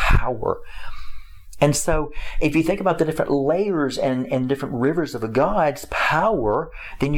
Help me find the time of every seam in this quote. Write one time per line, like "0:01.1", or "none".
none